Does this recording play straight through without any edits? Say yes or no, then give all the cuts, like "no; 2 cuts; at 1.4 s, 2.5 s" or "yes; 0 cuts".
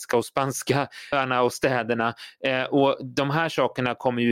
no; 1 cut; at 1.1 s